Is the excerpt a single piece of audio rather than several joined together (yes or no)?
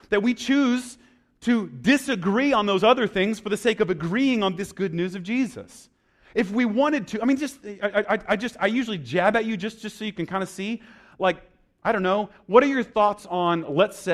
yes